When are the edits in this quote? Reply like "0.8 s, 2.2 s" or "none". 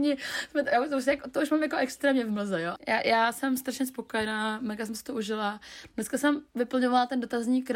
2.8 s